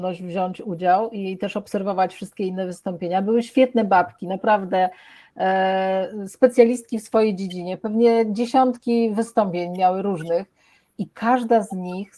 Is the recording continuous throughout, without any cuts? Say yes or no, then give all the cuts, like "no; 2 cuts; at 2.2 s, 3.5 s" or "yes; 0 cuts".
yes; 0 cuts